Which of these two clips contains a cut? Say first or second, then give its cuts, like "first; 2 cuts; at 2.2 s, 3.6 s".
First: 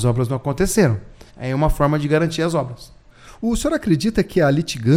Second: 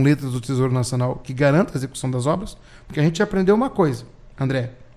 first; 1 cut; at 1.3 s